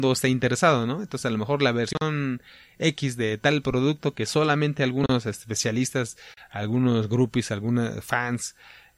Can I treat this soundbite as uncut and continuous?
yes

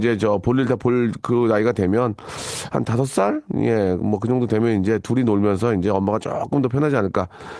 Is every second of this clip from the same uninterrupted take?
yes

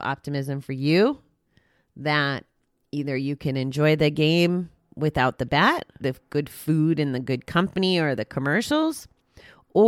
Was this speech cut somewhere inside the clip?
yes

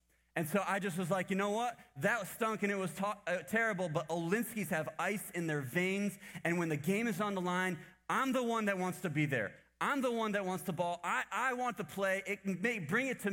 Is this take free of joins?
yes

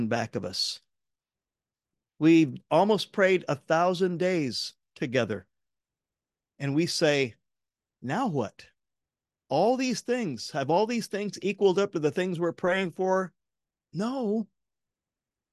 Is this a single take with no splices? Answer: no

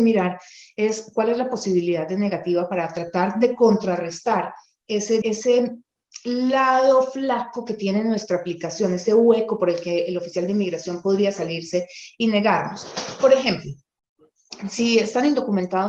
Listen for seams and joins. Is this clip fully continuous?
no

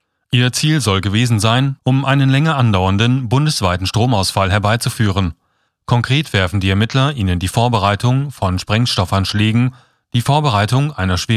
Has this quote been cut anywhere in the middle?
yes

